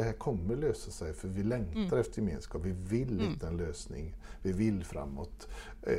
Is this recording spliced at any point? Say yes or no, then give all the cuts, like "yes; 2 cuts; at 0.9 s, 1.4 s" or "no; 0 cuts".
no; 0 cuts